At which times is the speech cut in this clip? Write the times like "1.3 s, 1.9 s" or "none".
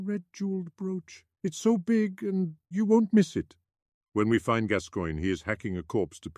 2.7 s